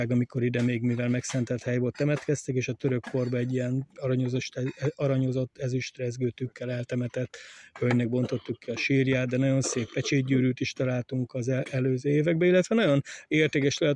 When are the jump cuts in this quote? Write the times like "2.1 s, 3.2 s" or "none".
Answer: none